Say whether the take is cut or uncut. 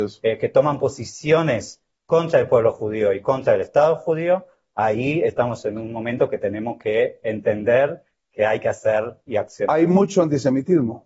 uncut